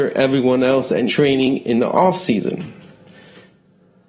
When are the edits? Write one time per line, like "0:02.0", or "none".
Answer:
0:01.1